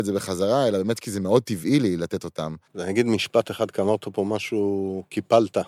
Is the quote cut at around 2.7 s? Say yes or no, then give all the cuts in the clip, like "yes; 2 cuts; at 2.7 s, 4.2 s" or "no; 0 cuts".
yes; 1 cut; at 2.7 s